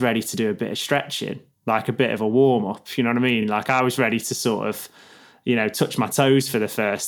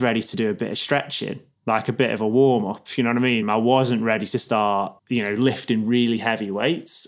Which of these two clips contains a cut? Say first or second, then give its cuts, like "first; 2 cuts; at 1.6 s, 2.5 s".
second; 2 cuts; at 3.4 s, 5.0 s